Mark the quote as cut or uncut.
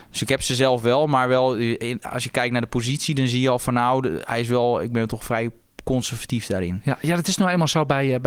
uncut